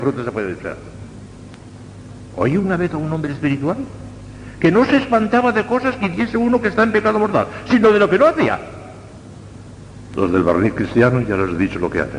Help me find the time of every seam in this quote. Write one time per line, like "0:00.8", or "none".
0:10.1